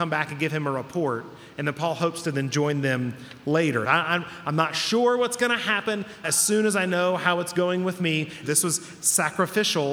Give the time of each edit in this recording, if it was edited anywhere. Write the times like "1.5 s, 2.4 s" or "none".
3.8 s, 6.2 s, 8.4 s